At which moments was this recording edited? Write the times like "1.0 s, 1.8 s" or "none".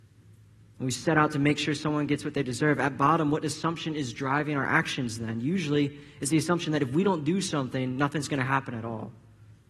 none